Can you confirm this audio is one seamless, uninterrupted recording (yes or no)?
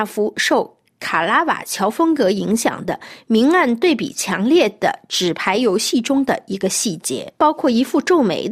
no